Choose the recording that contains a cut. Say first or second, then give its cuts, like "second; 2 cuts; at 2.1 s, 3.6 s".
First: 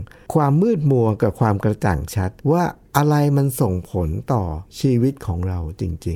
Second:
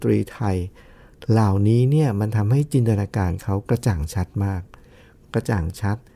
first; 2 cuts; at 2.4 s, 4.7 s